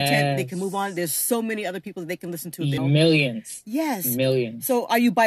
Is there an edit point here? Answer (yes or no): yes